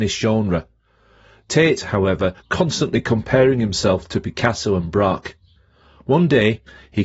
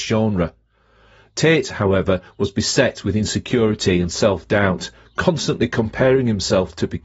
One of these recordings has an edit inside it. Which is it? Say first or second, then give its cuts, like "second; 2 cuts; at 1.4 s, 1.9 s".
first; 1 cut; at 2.4 s